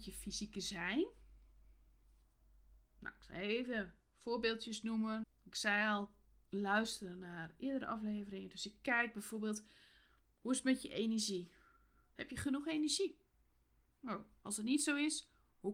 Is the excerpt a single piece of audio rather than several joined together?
no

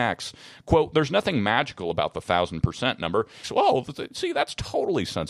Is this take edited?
yes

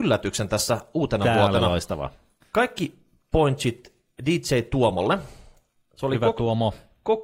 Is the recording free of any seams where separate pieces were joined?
yes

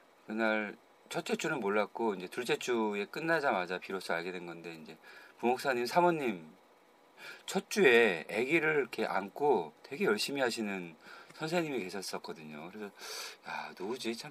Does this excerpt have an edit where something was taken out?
no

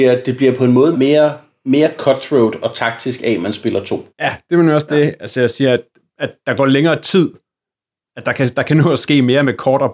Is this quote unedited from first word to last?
no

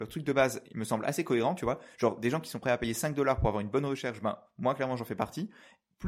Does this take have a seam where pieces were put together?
no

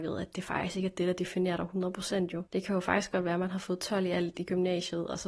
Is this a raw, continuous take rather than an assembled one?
no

